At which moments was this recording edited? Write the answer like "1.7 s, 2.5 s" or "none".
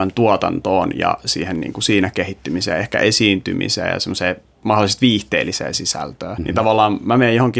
6.4 s